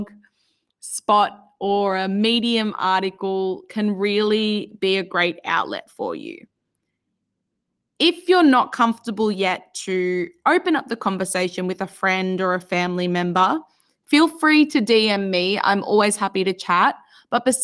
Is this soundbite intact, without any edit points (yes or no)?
yes